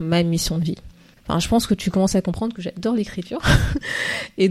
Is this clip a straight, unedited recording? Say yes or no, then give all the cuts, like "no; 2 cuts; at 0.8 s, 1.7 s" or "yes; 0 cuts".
no; 1 cut; at 1.2 s